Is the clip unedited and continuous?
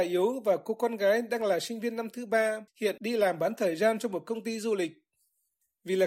yes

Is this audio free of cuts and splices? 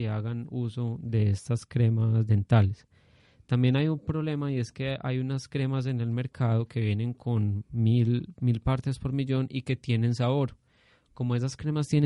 yes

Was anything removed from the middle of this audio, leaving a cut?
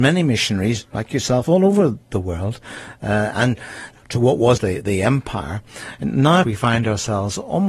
yes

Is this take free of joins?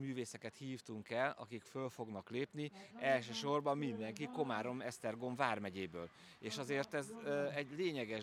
yes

